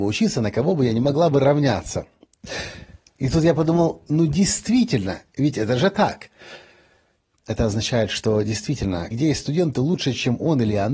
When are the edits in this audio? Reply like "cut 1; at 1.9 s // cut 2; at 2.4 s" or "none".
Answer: cut 1; at 7.4 s // cut 2; at 9.1 s